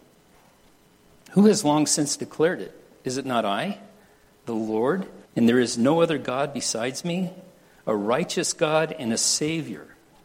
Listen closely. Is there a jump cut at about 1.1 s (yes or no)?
no